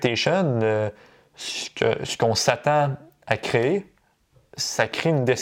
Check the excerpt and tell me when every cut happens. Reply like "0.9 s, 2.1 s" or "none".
none